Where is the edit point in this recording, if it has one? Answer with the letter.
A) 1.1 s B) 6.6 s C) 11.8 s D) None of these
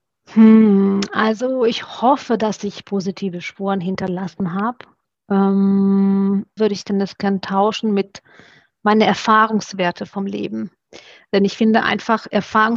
B